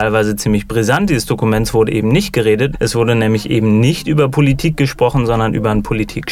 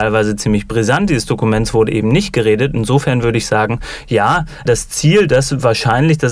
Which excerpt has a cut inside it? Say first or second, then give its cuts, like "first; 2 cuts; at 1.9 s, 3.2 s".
first; 1 cut; at 2.7 s